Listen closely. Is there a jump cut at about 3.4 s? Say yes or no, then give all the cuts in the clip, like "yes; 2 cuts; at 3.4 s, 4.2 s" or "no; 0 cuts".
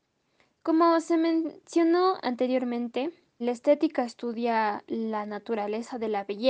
yes; 1 cut; at 3.4 s